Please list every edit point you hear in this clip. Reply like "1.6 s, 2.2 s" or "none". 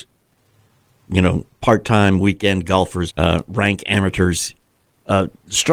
3.1 s